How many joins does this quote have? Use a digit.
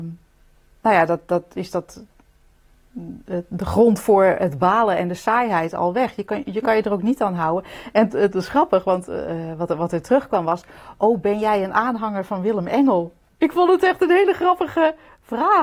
0